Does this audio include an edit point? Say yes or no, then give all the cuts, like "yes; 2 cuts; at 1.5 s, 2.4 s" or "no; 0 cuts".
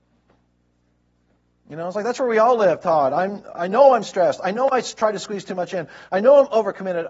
no; 0 cuts